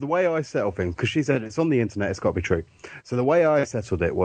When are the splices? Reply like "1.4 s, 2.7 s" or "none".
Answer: none